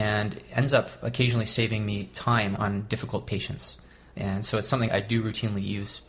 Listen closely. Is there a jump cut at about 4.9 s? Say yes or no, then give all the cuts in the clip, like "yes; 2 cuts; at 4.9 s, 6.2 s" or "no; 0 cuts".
yes; 2 cuts; at 2.6 s, 4.9 s